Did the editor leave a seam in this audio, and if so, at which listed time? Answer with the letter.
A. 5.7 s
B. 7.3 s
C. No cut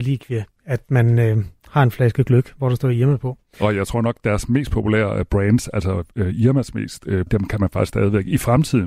B